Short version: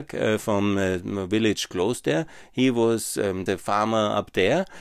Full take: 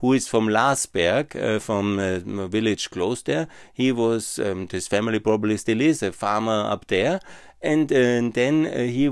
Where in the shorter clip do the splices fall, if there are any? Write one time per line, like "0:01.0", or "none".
0:03.5